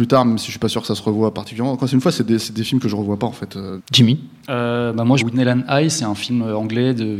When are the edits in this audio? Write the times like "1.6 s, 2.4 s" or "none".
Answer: 3.8 s, 5.2 s